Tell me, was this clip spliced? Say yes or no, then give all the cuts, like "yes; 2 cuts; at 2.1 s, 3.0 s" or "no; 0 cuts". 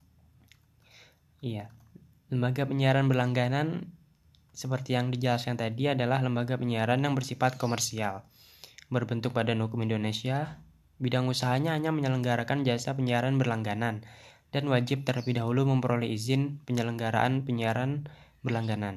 no; 0 cuts